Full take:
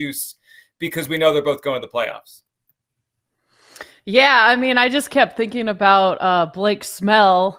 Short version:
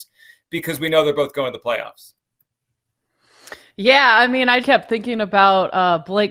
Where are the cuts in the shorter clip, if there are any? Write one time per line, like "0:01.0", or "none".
0:04.6

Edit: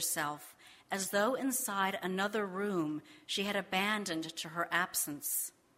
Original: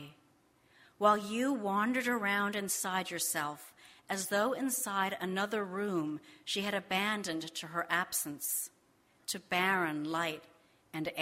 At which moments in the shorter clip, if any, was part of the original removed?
none

